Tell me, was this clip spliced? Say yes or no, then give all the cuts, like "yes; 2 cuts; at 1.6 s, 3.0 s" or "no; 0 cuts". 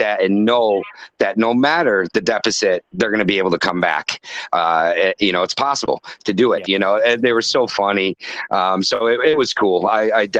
yes; 1 cut; at 6.7 s